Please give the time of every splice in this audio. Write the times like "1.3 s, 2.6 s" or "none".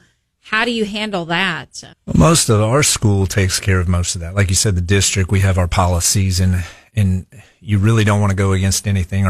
1.9 s